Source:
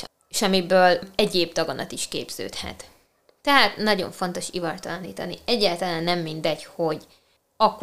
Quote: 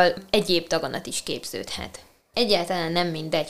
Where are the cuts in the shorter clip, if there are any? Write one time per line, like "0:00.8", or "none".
0:02.3